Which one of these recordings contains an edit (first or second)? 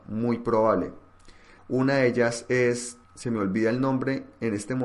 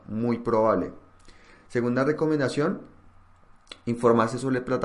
first